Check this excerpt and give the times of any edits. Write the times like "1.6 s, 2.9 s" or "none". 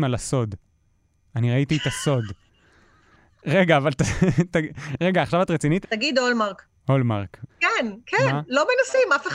5.8 s, 7.5 s